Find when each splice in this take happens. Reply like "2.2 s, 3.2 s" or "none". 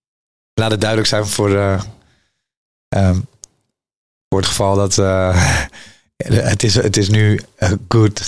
none